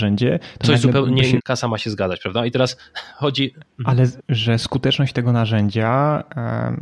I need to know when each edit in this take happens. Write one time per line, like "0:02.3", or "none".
0:01.4
0:04.2